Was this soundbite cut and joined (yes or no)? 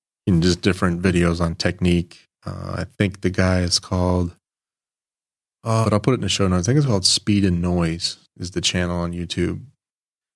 yes